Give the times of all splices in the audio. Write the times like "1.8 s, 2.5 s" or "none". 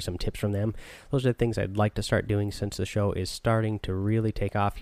none

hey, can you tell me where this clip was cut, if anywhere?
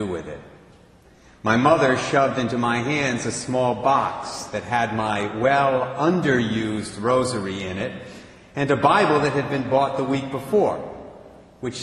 none

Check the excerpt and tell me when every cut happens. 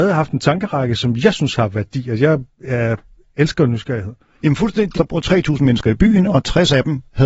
5.0 s

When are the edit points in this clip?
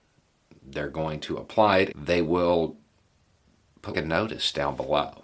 1.9 s, 3.9 s

